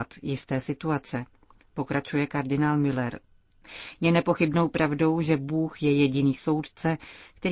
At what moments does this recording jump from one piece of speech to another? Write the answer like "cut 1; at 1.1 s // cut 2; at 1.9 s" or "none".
none